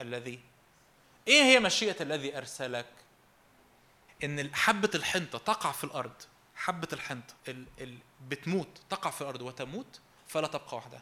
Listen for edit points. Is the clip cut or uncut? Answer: cut